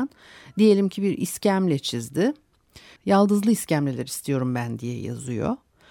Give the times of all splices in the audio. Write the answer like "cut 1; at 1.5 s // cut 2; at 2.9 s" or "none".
cut 1; at 3.0 s

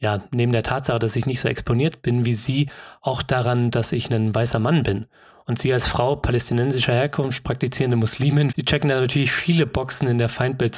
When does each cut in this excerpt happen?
cut 1; at 8.5 s

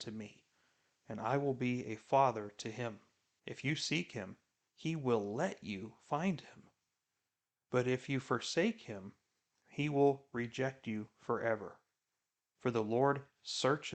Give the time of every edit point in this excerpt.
cut 1; at 3.4 s // cut 2; at 12.5 s

